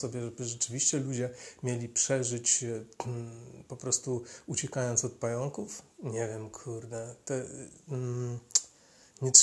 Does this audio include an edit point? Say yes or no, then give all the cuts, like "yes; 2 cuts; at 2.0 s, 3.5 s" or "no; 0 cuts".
no; 0 cuts